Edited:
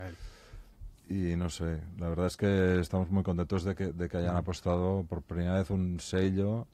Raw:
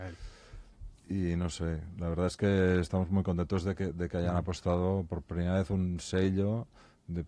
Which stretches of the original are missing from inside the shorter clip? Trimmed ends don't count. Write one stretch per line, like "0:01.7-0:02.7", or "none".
none